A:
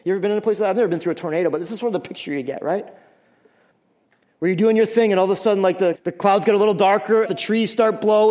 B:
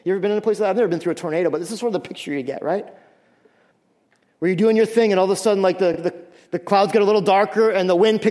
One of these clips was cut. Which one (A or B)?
A